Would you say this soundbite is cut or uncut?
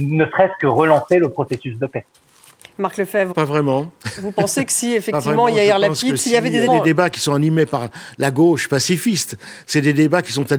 cut